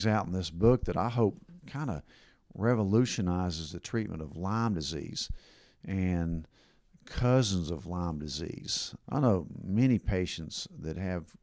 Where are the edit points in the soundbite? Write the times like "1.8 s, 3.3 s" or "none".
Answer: 9.0 s